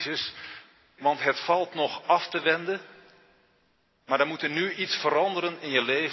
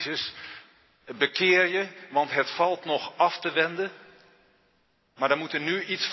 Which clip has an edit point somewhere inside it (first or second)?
first